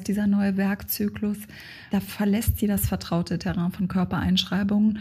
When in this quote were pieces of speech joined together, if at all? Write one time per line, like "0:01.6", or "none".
0:01.9